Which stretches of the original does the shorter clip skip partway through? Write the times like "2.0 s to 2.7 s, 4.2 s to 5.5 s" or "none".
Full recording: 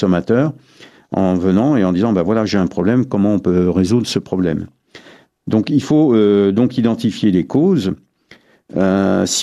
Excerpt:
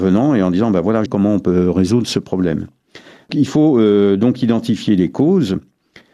2.5 s to 3.1 s, 5.3 s to 5.6 s